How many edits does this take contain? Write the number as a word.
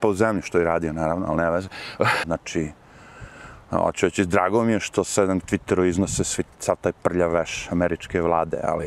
one